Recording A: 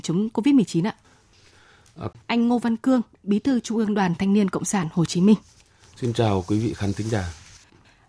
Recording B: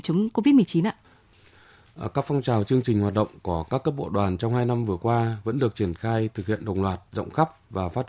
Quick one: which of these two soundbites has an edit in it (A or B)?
A